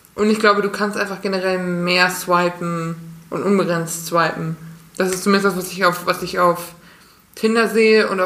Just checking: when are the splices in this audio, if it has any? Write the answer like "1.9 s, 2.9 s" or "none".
none